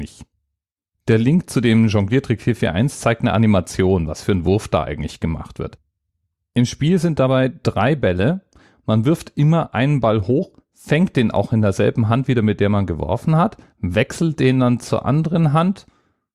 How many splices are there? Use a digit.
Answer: 0